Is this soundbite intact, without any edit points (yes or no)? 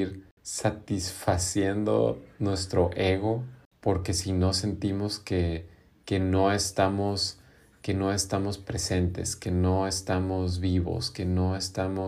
yes